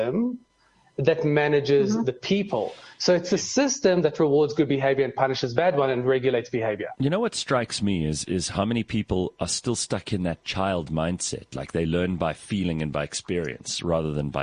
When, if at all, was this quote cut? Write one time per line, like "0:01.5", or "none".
none